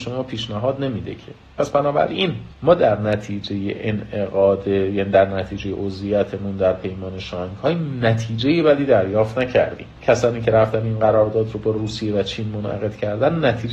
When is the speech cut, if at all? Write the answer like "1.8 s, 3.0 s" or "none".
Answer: 2.5 s, 10.0 s